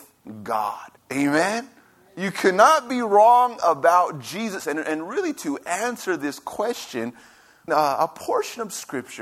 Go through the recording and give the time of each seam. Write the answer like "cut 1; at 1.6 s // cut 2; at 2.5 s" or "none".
cut 1; at 1.0 s // cut 2; at 4.6 s // cut 3; at 7.7 s